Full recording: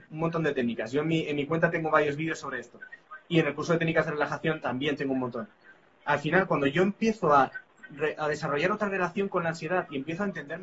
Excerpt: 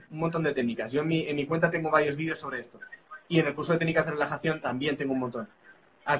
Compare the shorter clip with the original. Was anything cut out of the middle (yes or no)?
no